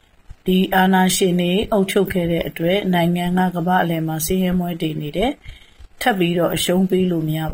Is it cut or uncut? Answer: uncut